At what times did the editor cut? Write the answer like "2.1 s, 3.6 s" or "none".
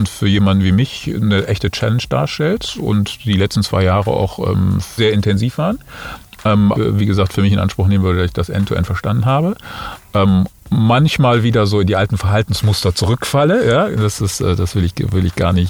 5.0 s, 6.7 s